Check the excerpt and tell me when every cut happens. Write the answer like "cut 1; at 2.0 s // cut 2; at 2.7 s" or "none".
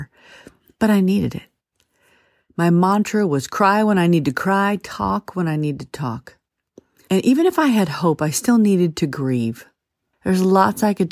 cut 1; at 10.1 s